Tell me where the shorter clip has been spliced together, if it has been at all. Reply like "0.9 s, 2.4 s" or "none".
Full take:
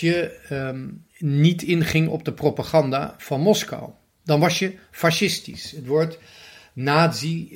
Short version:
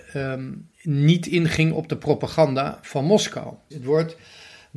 3.7 s